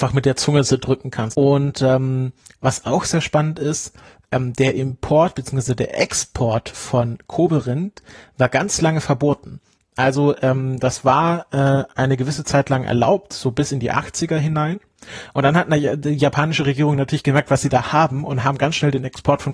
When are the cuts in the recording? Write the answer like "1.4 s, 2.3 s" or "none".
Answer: 1.3 s